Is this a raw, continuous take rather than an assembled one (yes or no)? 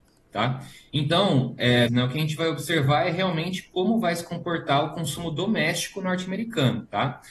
no